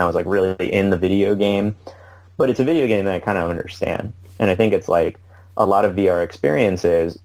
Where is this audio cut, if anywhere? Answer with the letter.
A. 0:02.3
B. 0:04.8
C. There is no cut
C